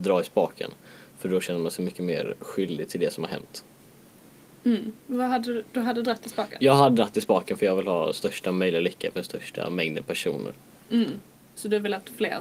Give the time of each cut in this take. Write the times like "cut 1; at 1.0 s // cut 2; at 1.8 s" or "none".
none